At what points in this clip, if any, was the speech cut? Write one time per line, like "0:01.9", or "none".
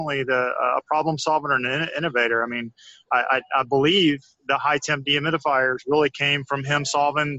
none